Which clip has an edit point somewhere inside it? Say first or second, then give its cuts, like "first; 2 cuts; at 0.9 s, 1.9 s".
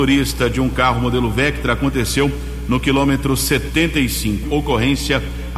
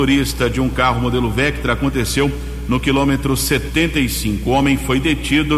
first; 1 cut; at 4.4 s